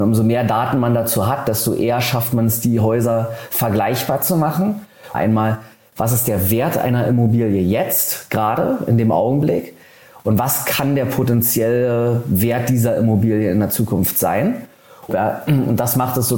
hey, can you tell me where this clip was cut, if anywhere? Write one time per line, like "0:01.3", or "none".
0:05.1
0:15.1